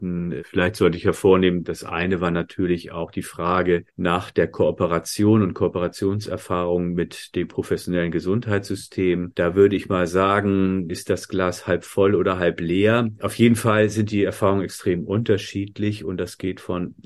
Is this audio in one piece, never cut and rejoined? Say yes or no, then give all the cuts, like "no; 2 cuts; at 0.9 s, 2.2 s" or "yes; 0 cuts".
no; 1 cut; at 10.9 s